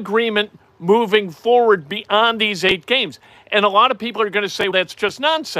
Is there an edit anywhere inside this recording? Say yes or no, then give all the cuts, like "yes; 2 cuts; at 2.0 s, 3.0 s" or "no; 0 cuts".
yes; 1 cut; at 4.7 s